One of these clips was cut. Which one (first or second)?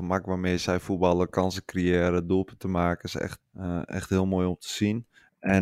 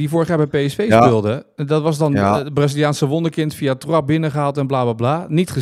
first